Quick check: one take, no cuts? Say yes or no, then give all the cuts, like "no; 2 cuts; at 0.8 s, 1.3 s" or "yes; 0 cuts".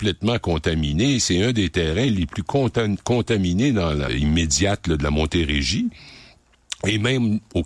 no; 1 cut; at 4.1 s